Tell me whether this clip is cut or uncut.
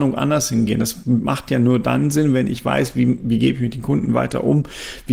uncut